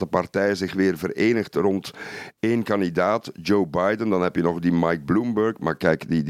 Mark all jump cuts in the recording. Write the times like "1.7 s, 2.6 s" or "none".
none